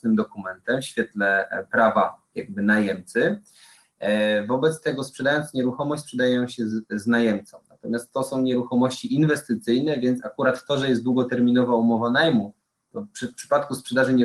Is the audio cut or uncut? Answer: uncut